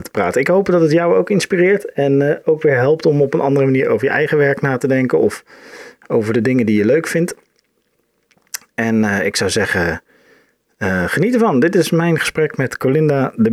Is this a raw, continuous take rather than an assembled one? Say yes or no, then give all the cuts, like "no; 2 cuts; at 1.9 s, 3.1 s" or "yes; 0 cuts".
yes; 0 cuts